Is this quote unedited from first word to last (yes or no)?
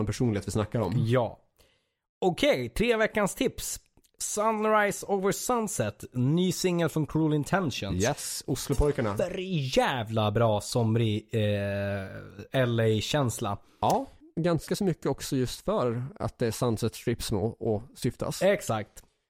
yes